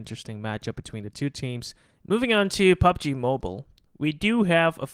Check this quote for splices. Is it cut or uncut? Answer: cut